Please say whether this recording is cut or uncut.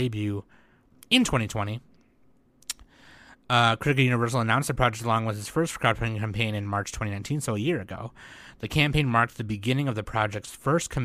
uncut